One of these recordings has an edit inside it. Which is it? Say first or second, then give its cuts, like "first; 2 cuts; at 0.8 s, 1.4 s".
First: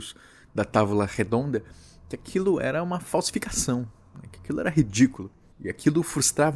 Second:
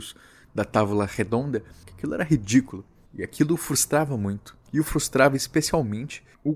second; 2 cuts; at 1.8 s, 4.7 s